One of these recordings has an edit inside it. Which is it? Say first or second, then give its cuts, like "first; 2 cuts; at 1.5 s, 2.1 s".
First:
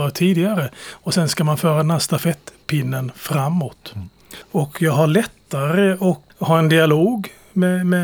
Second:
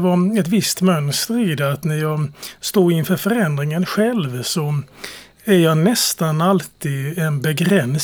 first; 2 cuts; at 4.4 s, 6.3 s